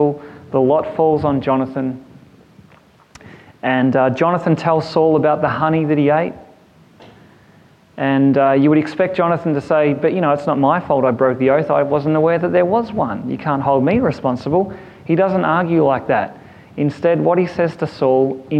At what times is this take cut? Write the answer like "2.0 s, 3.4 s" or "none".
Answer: none